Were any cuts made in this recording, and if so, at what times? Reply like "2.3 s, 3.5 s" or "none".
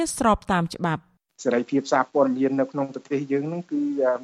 none